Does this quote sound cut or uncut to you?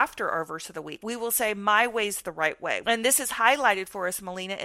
cut